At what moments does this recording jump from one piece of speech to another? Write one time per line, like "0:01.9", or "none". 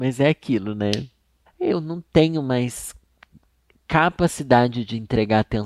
0:01.5